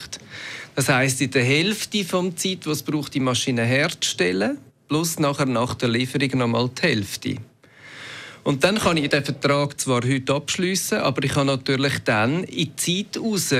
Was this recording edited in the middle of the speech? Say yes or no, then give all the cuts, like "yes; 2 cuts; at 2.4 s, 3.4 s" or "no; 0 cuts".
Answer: no; 0 cuts